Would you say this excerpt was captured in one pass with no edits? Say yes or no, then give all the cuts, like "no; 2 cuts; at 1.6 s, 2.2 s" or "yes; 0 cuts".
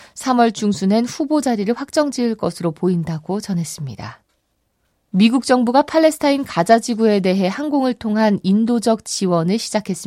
no; 1 cut; at 5.0 s